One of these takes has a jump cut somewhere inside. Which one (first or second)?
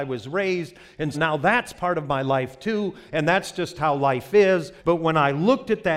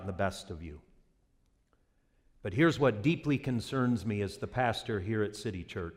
first